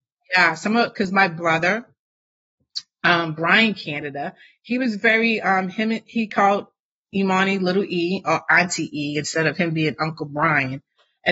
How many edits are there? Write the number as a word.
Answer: zero